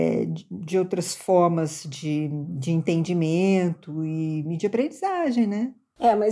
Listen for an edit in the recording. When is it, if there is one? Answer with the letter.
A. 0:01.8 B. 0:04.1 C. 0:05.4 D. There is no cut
D